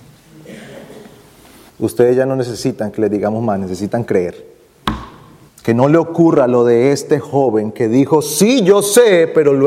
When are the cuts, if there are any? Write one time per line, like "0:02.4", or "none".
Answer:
0:01.7
0:05.5